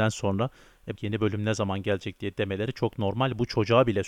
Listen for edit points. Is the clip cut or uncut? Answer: cut